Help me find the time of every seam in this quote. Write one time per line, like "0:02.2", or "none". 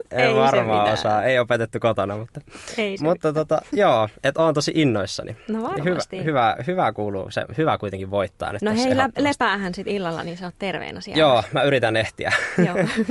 none